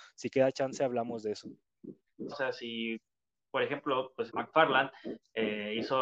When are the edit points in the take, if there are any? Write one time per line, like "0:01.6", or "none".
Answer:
0:02.3
0:04.3